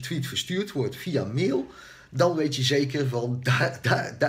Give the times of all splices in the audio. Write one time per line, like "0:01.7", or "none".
none